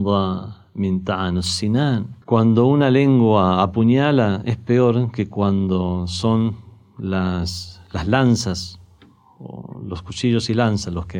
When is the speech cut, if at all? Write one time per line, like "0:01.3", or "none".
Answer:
0:02.2